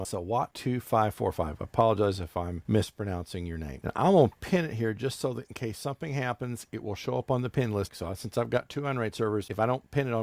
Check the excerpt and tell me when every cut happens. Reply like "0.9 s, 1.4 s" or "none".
7.9 s